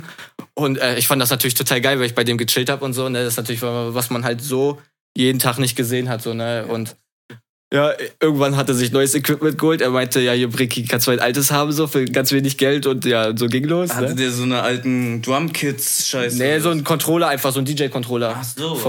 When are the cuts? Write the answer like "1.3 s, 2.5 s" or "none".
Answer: none